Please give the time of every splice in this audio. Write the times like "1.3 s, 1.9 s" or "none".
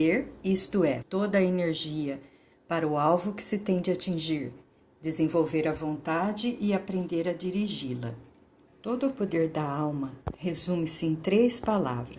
1.0 s, 8.7 s